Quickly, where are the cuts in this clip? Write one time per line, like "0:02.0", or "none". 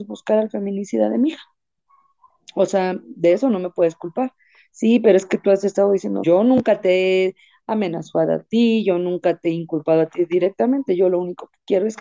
0:06.2